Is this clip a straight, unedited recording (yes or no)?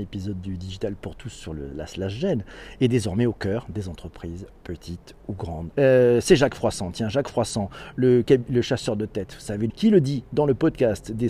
no